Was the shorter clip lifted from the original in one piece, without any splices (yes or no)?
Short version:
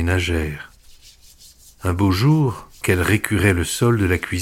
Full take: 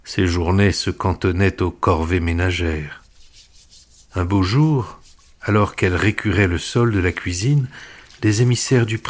no